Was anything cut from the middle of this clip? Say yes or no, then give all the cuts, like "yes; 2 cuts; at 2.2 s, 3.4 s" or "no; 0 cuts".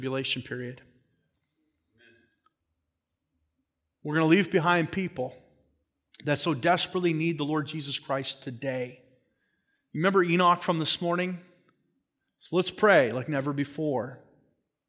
yes; 1 cut; at 12.3 s